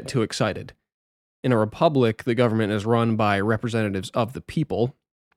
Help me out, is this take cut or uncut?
uncut